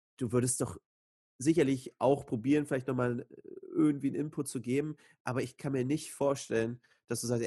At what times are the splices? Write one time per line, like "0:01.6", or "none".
none